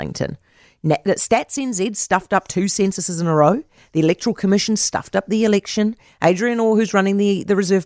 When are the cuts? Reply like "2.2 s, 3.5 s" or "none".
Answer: none